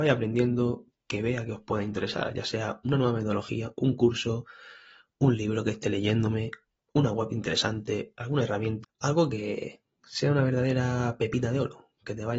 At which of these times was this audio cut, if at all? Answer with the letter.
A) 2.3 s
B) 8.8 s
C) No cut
B